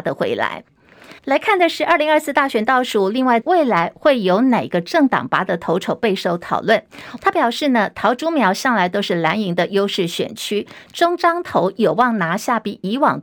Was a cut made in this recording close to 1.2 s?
yes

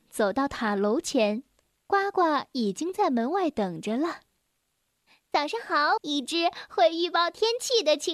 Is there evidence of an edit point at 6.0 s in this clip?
yes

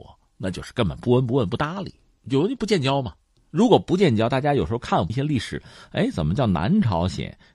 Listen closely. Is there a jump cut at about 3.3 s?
no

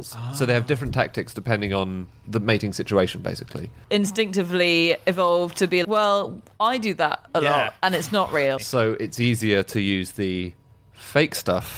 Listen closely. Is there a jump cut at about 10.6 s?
no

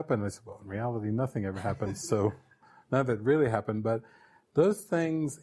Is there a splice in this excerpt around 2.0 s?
no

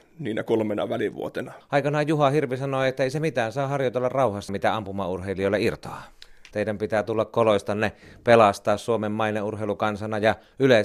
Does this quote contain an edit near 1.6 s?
yes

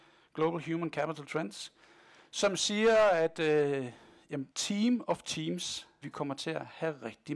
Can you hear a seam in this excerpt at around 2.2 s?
no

